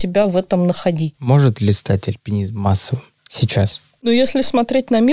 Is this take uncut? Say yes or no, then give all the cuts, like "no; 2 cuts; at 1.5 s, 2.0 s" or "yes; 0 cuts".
yes; 0 cuts